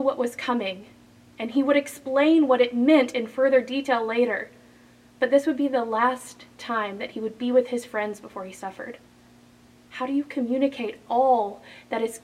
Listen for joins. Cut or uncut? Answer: uncut